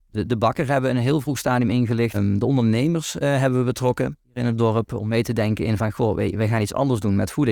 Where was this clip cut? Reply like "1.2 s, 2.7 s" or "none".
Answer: 2.1 s, 4.2 s